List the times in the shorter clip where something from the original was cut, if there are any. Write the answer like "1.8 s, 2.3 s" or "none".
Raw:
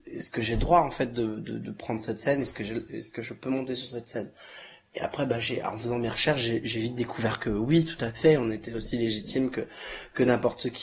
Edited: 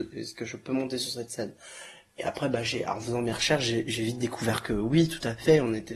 none